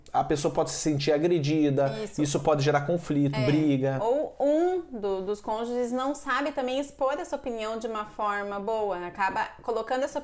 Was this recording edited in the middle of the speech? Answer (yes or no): no